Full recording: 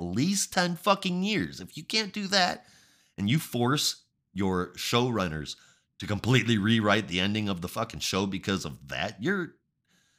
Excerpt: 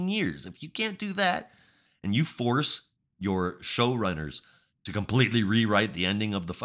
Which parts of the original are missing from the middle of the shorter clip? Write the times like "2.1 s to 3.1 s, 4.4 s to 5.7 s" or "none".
none